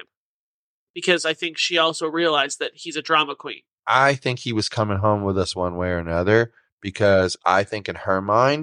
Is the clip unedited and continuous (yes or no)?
no